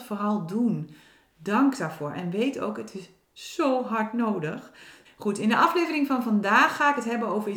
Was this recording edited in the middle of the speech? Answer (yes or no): yes